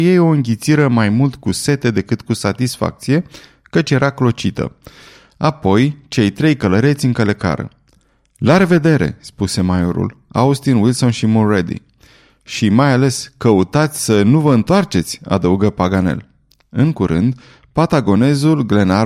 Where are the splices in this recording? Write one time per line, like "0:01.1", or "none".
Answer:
none